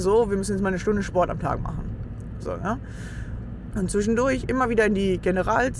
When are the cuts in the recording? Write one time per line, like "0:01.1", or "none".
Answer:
0:03.7